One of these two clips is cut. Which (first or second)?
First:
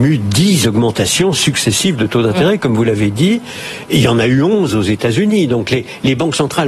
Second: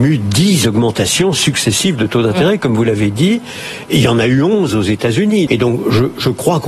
second